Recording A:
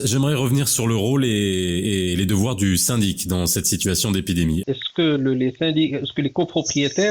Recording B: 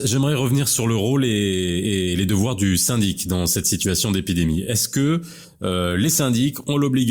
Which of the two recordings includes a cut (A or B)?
A